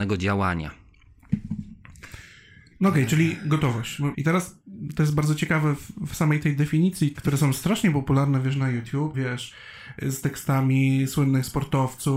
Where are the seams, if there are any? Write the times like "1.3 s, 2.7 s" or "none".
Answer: 4.1 s, 7.1 s, 9.1 s